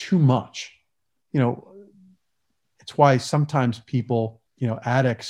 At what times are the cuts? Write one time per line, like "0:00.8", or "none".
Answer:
0:01.2